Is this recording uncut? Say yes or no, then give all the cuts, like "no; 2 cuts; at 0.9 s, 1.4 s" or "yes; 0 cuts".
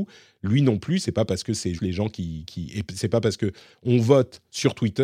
no; 1 cut; at 1.8 s